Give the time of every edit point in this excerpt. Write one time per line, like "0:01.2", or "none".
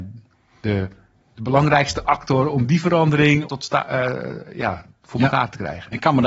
0:03.4

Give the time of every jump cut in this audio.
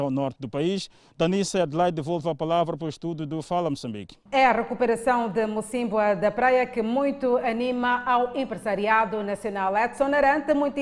0:04.3

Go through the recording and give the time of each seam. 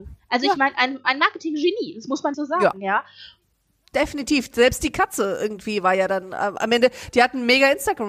0:02.3

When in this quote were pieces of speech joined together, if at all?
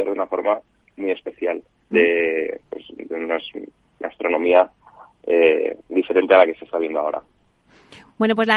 0:01.9
0:05.8

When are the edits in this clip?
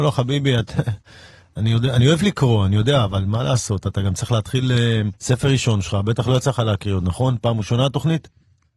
0:05.1

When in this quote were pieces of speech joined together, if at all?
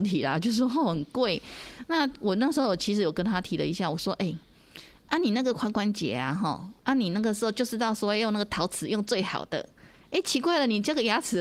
none

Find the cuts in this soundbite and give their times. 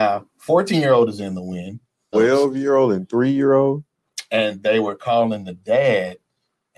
0:02.1

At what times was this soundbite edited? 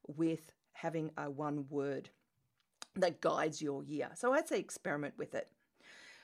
none

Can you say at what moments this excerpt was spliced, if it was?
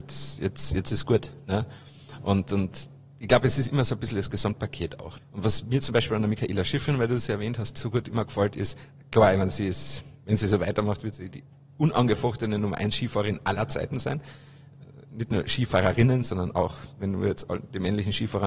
0:05.2

